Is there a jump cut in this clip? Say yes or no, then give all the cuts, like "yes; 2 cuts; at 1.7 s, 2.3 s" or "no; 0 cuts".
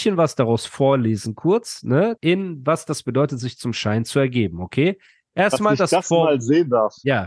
yes; 1 cut; at 2.2 s